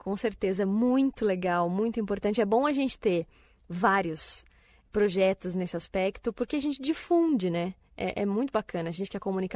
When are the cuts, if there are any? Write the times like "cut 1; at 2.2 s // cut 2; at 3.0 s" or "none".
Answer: none